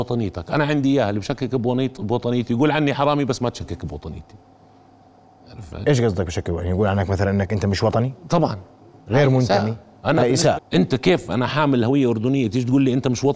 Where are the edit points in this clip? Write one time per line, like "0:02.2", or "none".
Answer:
0:10.6